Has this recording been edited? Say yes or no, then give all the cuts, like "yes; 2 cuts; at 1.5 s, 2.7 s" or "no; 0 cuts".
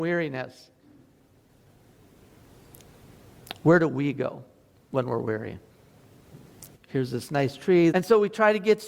yes; 2 cuts; at 6.8 s, 7.9 s